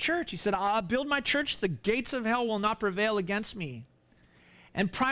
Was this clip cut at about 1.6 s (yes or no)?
no